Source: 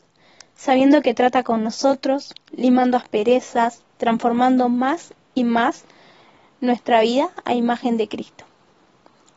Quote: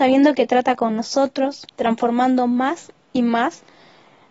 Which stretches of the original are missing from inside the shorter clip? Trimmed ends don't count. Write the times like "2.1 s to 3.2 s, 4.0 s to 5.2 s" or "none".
2.4 s to 3.9 s